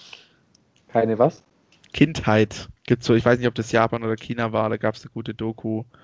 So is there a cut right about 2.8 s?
yes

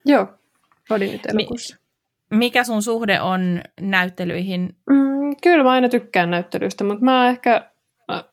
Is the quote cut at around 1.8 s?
no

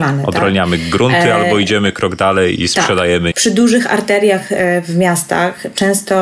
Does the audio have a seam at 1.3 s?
no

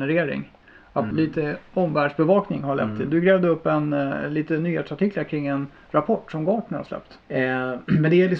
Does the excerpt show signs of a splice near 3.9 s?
no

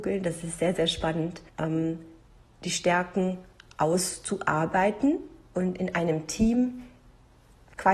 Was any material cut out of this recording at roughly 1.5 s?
yes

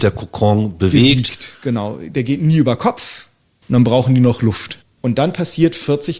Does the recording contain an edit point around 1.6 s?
no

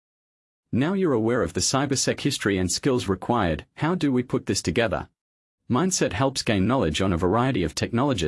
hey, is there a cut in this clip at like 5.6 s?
yes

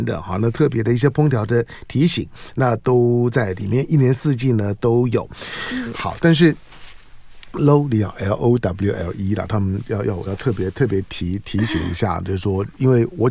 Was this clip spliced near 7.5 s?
no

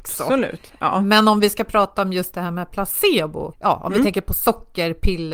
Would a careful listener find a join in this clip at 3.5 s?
yes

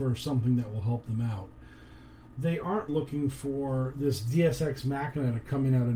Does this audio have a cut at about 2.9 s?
yes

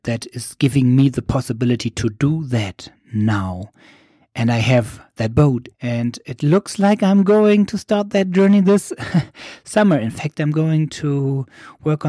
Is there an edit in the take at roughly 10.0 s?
no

